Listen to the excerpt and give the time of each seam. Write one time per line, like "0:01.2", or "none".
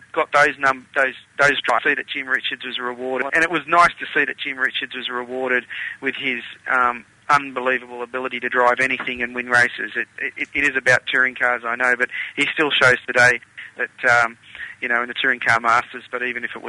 0:03.3